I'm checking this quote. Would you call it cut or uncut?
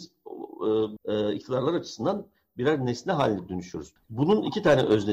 cut